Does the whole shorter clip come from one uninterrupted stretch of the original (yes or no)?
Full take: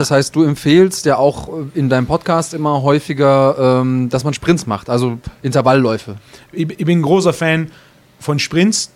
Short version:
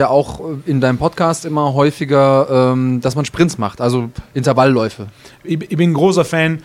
yes